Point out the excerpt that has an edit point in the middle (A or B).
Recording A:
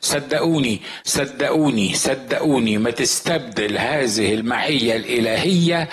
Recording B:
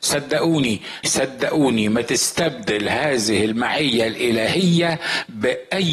B